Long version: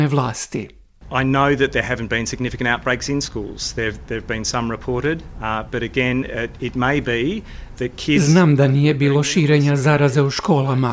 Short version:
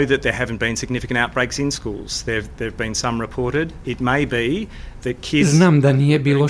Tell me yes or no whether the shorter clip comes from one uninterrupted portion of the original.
no